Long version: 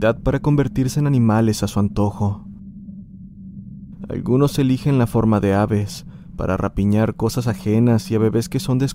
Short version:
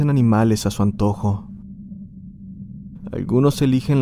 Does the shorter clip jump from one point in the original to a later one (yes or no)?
no